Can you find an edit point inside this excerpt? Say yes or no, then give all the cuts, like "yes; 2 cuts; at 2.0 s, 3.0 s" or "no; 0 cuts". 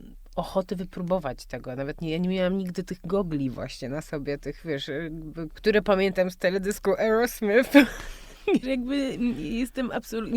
yes; 2 cuts; at 5.5 s, 8.6 s